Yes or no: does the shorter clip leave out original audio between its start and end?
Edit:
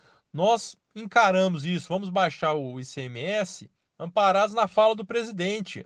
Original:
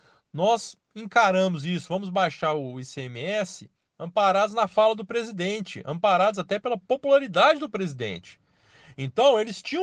no